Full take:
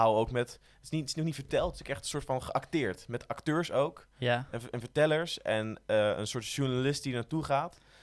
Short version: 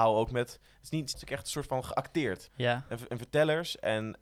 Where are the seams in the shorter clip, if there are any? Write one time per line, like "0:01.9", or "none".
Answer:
0:01.1
0:02.5